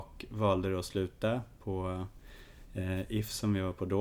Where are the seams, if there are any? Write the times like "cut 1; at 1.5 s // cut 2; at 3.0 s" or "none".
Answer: none